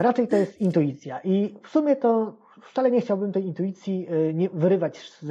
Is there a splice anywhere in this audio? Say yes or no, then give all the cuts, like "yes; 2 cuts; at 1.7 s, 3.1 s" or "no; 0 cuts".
no; 0 cuts